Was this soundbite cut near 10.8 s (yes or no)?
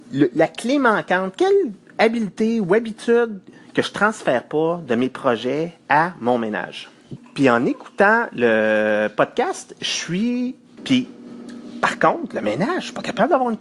yes